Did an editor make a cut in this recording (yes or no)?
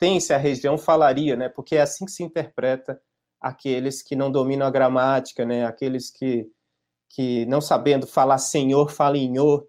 no